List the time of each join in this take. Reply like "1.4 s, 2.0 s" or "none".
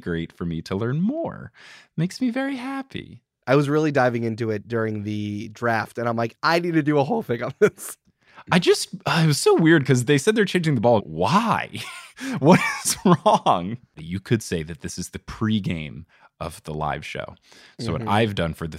11.0 s, 14.0 s